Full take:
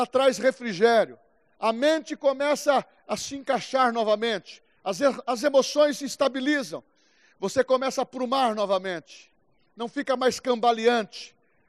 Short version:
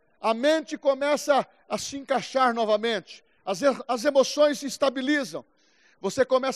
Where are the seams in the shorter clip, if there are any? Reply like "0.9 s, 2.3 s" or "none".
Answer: none